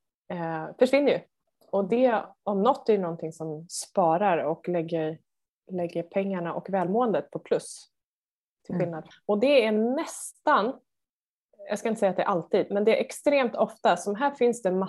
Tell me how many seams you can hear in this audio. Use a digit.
1